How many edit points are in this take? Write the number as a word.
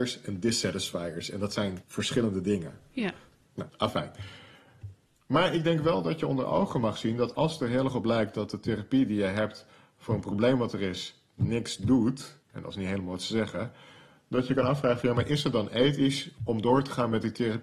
one